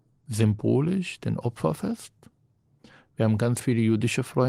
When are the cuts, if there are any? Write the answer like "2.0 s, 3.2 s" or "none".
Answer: none

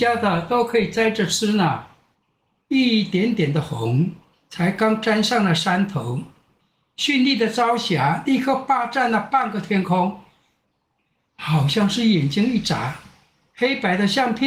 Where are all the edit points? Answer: 2.6 s

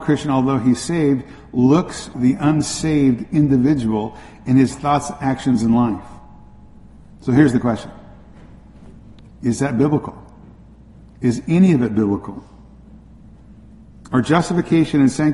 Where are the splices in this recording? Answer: 2.1 s

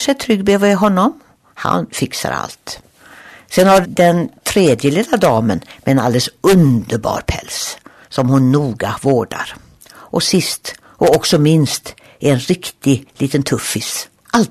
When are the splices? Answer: 3.8 s

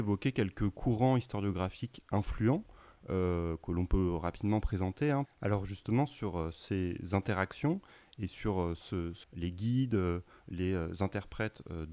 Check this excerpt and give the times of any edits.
5.3 s, 9.2 s

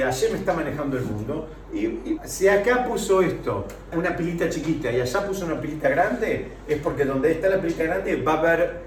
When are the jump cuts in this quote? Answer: 2.2 s, 3.9 s

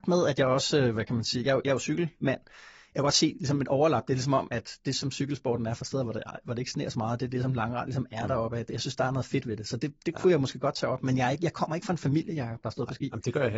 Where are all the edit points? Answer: none

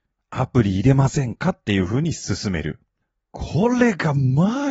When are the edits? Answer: none

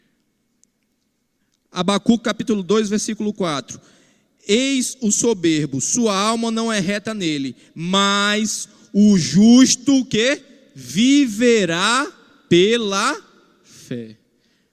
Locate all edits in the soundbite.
none

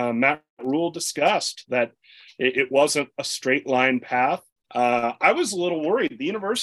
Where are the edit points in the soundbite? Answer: 4.7 s

